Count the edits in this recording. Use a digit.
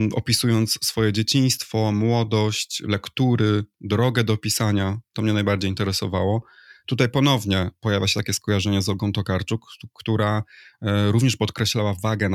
0